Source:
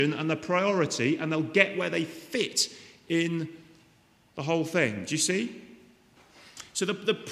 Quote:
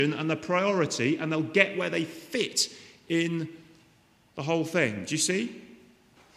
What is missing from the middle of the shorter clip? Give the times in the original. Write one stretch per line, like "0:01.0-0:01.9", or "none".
none

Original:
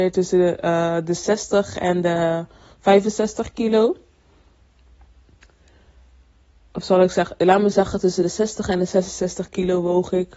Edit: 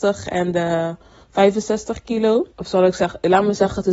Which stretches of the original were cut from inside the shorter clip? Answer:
0:04.0-0:06.7

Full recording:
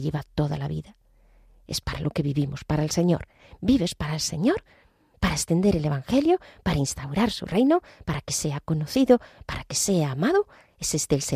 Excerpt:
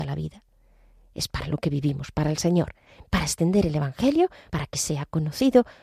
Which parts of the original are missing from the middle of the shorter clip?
0:03.6-0:05.1
0:06.6-0:08.0

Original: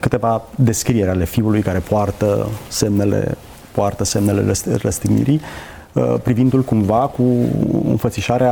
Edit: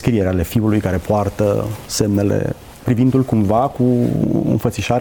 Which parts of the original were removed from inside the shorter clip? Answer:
0:03.6-0:06.2

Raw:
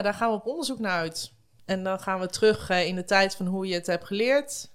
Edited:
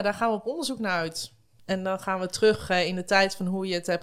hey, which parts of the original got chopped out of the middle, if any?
none

